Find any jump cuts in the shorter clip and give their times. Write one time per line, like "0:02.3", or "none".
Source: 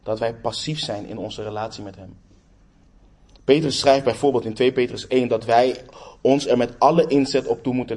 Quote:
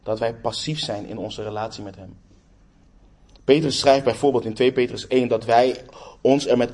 none